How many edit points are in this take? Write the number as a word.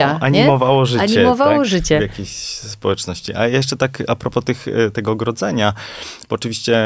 zero